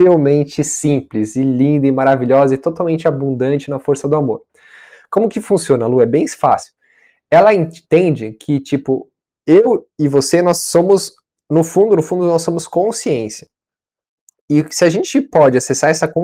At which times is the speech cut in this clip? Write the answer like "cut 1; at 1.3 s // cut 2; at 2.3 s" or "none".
none